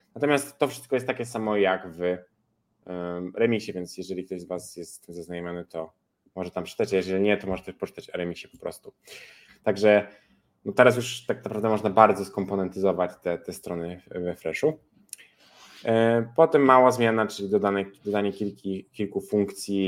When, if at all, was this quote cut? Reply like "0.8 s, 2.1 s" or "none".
9.5 s